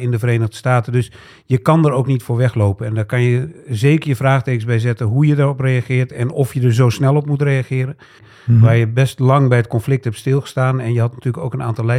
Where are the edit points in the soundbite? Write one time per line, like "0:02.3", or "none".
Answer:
0:08.2